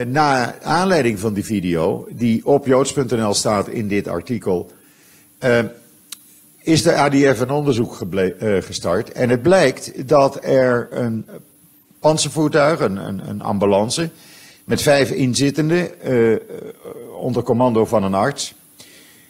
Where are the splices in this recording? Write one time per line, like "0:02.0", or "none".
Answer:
none